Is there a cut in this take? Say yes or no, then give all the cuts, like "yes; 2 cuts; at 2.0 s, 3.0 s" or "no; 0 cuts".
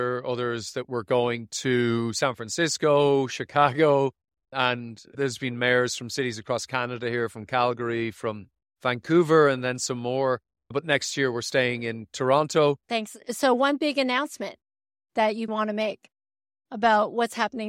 yes; 2 cuts; at 12.8 s, 15.5 s